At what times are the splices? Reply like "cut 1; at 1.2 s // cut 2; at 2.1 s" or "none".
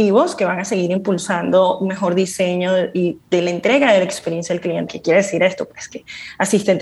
cut 1; at 4.9 s